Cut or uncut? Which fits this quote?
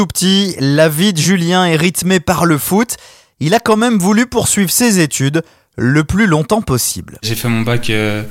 uncut